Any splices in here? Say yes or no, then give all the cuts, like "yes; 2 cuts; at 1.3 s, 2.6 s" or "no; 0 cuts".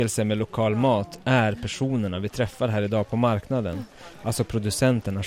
no; 0 cuts